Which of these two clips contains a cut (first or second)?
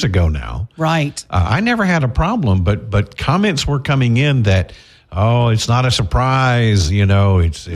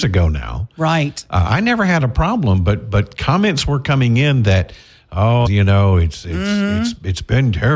second